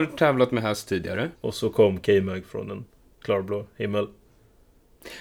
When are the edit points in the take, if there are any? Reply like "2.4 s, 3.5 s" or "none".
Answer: 1.4 s